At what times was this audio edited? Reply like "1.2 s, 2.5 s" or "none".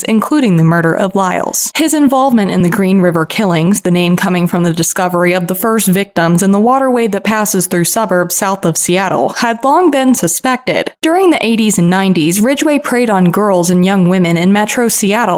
1.7 s, 10.9 s